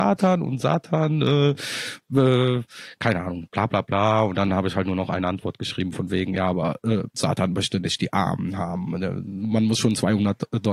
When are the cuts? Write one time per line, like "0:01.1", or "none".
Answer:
none